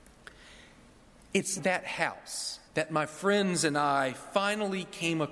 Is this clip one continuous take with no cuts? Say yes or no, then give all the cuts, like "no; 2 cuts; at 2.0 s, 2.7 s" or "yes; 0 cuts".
no; 2 cuts; at 1.6 s, 2.7 s